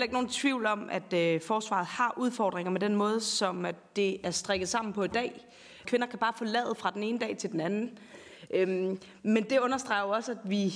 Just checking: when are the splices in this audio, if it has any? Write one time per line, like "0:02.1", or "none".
0:05.8